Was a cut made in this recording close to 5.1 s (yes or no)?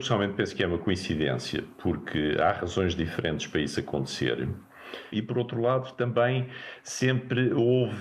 yes